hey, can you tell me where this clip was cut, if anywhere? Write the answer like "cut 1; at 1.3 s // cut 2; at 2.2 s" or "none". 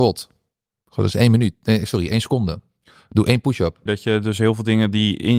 cut 1; at 3.9 s

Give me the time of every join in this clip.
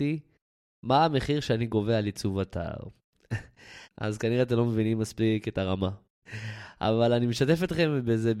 cut 1; at 3.8 s // cut 2; at 6.2 s

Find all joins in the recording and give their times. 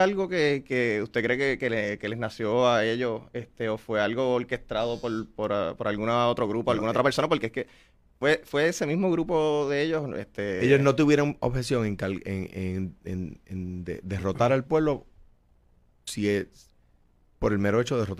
none

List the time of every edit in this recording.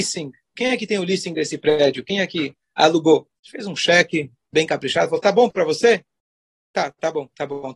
cut 1; at 3.4 s

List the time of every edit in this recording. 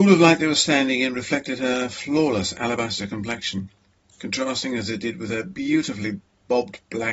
none

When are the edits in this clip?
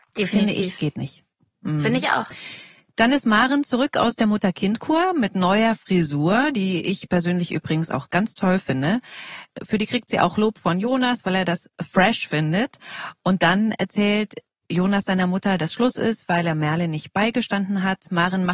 none

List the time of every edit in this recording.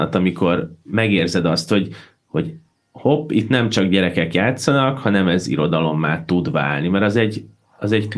none

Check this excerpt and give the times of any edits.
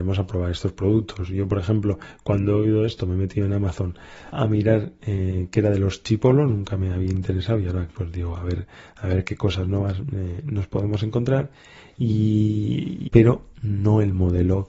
cut 1; at 4.3 s // cut 2; at 13.1 s

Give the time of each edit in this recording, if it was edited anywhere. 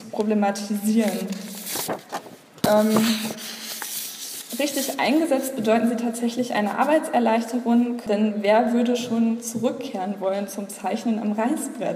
cut 1; at 8.1 s

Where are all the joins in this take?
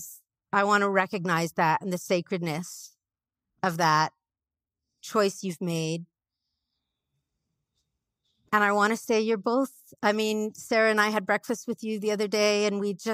none

